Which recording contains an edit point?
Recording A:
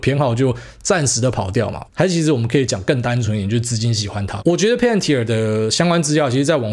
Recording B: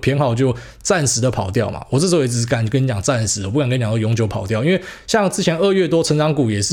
A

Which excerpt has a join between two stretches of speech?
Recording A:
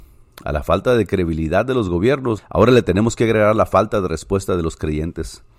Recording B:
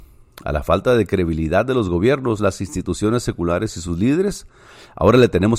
A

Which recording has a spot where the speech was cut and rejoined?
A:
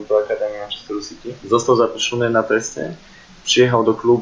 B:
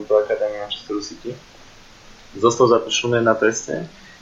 A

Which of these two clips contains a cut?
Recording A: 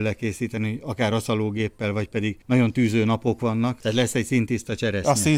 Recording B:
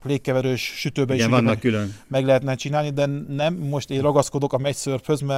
A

